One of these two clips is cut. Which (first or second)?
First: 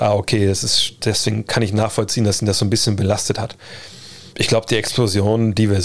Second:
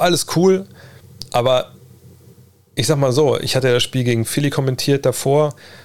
first